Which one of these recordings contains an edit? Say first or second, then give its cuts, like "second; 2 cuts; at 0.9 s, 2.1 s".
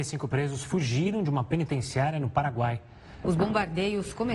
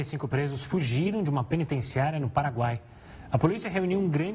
first; 1 cut; at 3.2 s